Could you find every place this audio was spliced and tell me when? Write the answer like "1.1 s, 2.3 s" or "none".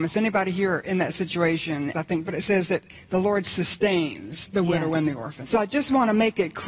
1.9 s, 5.4 s